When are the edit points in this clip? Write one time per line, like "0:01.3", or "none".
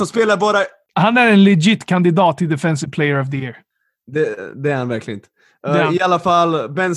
none

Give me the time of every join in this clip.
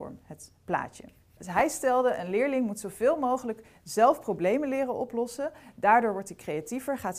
0:01.4

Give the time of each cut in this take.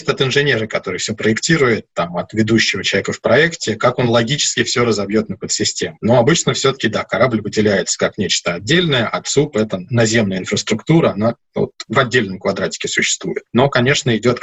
none

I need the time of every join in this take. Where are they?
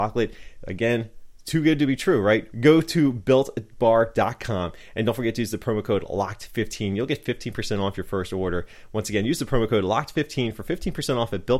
0:02.5

